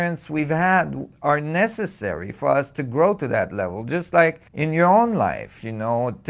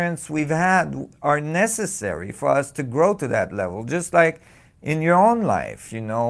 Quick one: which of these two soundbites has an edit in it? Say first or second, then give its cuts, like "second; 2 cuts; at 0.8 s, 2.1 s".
first; 1 cut; at 4.5 s